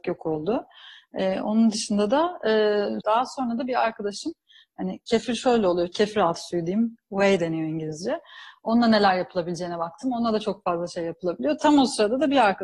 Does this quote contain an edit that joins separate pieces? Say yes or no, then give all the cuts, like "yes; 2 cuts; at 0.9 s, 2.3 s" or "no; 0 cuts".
yes; 2 cuts; at 3.0 s, 5.9 s